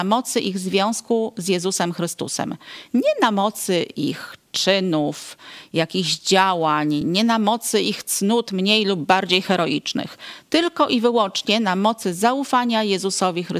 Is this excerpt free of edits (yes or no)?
yes